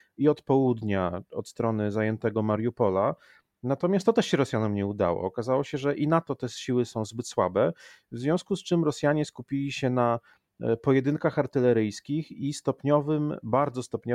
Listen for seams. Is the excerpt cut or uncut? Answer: uncut